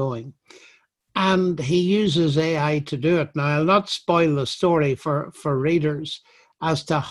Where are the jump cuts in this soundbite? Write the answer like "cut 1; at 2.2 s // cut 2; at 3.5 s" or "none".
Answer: none